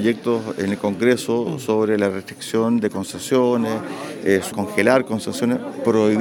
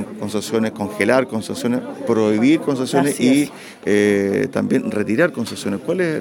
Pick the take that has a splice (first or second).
first